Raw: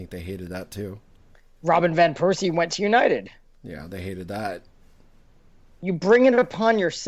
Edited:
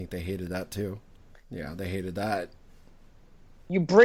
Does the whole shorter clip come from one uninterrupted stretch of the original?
no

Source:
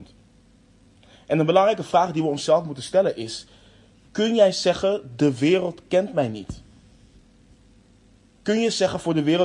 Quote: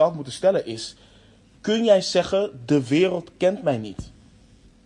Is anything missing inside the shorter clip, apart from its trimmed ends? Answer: no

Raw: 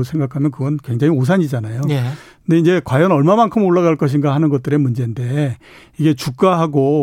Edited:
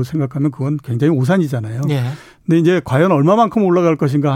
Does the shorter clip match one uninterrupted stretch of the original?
yes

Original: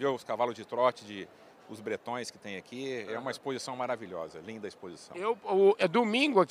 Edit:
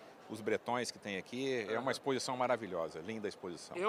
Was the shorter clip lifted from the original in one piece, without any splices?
yes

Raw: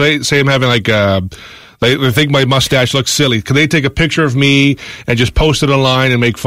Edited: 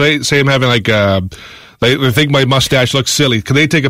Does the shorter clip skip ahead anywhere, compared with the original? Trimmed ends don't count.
no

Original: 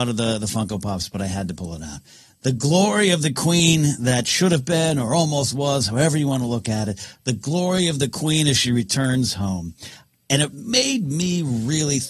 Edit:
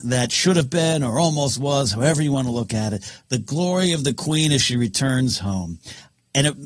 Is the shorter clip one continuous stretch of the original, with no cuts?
yes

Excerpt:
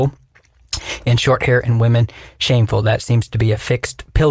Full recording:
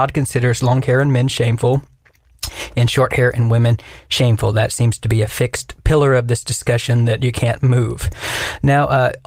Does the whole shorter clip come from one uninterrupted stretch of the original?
yes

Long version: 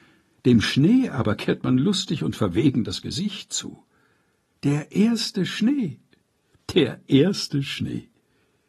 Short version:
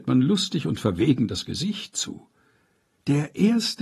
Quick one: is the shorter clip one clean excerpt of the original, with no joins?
yes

